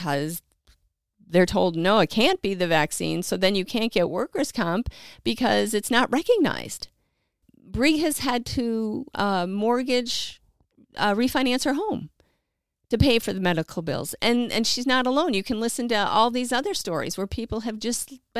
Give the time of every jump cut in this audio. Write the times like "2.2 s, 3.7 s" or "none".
none